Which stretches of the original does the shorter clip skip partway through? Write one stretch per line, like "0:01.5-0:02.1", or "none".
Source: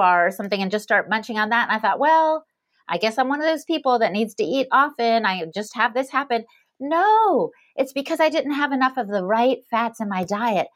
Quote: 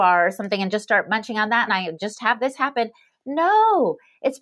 0:01.7-0:05.2